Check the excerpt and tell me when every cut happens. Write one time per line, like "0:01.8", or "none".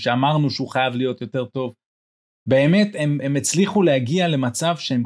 none